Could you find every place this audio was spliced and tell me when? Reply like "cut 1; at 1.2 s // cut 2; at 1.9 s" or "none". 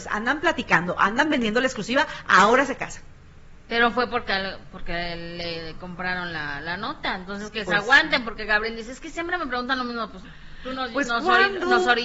cut 1; at 8.2 s